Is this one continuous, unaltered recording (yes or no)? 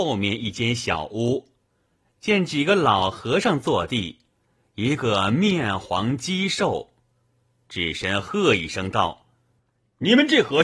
no